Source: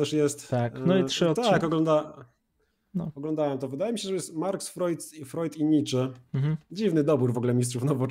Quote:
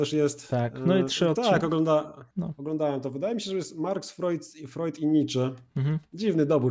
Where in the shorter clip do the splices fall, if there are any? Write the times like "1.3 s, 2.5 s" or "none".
2.3 s